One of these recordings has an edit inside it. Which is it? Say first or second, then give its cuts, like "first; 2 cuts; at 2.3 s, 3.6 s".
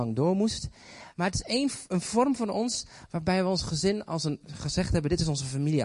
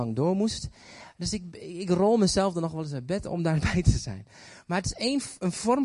first; 1 cut; at 1.1 s